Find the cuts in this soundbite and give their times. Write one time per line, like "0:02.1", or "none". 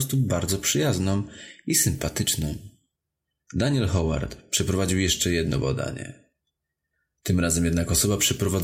none